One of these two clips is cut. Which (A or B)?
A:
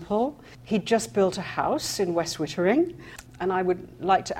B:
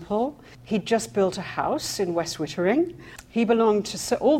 A